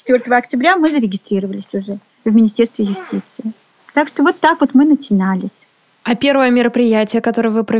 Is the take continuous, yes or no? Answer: yes